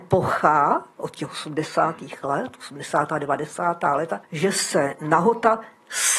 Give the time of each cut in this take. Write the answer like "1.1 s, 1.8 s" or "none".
4.2 s